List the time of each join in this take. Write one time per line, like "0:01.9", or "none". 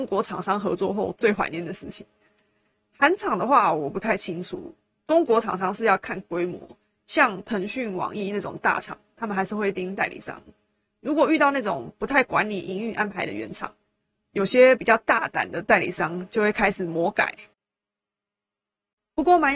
none